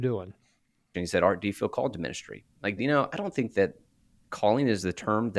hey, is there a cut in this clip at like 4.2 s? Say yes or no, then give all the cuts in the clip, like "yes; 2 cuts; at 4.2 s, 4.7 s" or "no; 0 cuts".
no; 2 cuts; at 0.9 s, 2.8 s